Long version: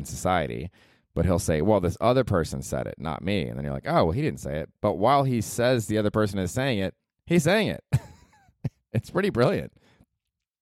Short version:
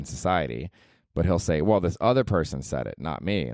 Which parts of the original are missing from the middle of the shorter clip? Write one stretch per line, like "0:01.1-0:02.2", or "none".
none